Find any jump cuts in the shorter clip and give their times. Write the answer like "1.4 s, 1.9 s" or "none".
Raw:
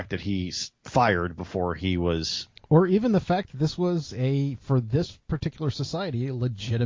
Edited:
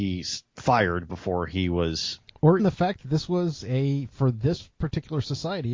2.6 s